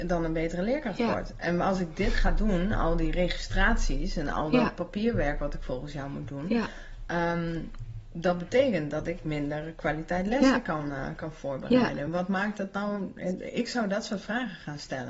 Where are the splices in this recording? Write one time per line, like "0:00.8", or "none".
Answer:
none